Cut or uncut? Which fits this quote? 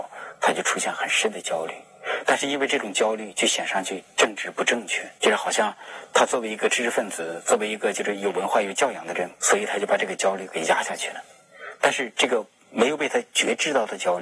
cut